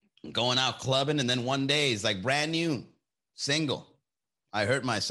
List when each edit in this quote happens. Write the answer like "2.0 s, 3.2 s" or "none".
none